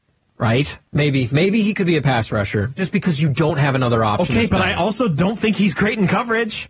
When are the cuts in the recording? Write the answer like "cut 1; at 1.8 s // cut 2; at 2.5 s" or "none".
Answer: cut 1; at 2.8 s